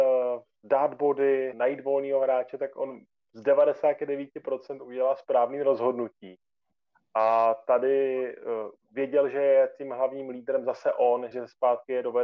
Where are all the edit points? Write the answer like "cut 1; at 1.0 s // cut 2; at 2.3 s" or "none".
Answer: cut 1; at 1.5 s // cut 2; at 11.3 s

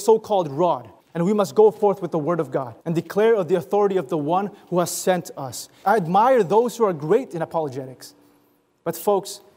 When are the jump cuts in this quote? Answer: cut 1; at 1.0 s // cut 2; at 2.8 s // cut 3; at 5.8 s

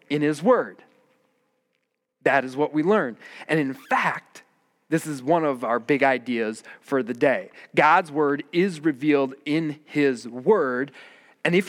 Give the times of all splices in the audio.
none

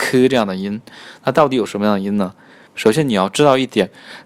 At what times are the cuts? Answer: cut 1; at 2.7 s

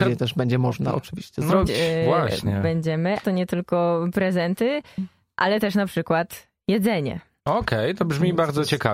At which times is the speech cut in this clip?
cut 1; at 1.7 s // cut 2; at 3.2 s // cut 3; at 7.4 s

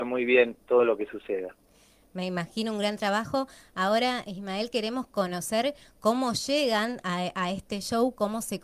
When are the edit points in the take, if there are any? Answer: none

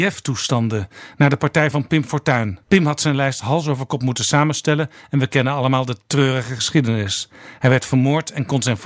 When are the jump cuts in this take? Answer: cut 1; at 2.6 s

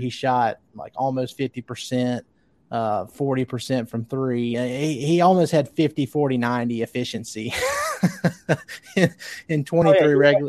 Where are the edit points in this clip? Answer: none

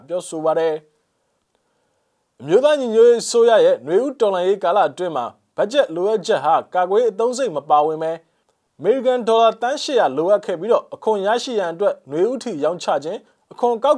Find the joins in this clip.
none

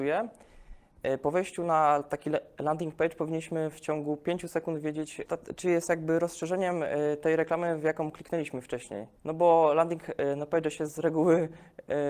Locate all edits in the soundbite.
cut 1; at 5.3 s // cut 2; at 9.2 s

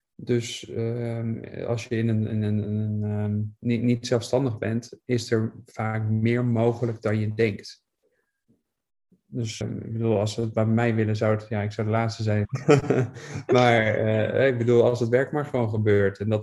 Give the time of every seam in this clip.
cut 1; at 9.6 s // cut 2; at 12.4 s

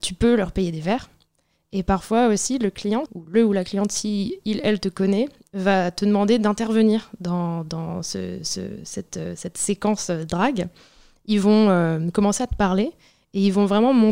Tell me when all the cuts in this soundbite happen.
cut 1; at 3.1 s

